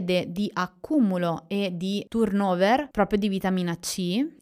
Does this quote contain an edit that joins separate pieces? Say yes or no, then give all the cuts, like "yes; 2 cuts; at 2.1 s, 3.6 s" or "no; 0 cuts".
no; 0 cuts